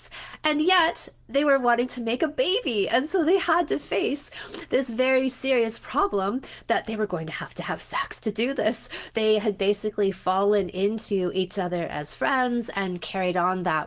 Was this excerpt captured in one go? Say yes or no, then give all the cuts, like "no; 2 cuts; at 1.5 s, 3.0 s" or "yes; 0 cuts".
no; 1 cut; at 9.1 s